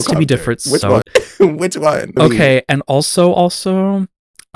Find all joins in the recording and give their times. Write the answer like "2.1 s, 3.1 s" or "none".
1.0 s, 2.2 s